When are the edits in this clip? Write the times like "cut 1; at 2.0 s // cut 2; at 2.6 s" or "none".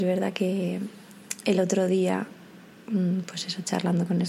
none